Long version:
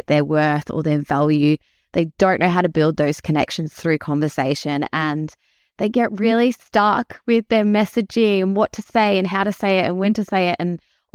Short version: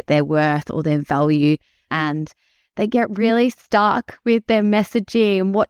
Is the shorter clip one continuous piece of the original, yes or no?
no